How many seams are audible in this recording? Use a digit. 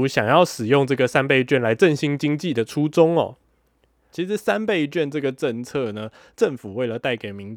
1